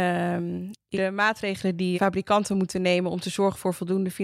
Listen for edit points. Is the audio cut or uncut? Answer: cut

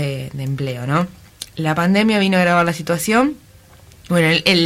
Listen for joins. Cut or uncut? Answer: uncut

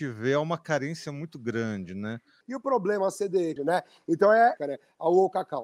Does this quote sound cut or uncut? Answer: cut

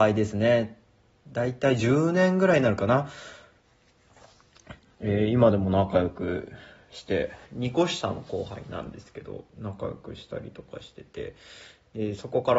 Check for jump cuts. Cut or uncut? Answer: cut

